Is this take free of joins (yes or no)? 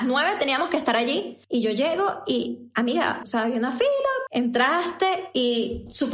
no